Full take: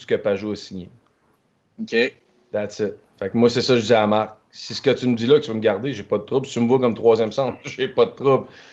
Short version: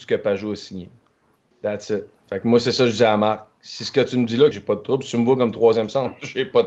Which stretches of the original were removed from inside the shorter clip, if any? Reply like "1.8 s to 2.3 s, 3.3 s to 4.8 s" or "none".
1.5 s to 2.4 s, 5.4 s to 5.9 s